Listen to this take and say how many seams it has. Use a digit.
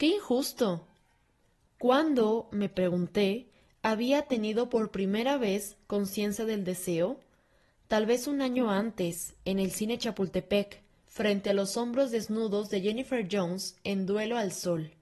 0